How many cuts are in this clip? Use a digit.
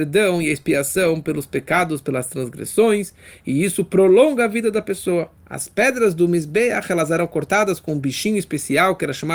1